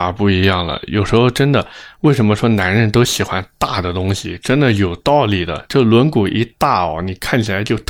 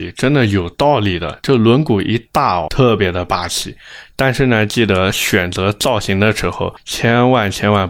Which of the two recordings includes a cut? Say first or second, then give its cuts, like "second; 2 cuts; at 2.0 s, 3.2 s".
second; 1 cut; at 2.7 s